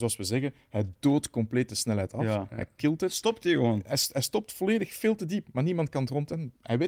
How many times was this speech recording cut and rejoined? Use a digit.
0